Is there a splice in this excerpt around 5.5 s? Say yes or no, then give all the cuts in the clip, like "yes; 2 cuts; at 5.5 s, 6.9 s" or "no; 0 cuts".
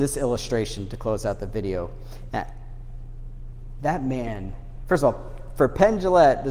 no; 1 cut; at 2.3 s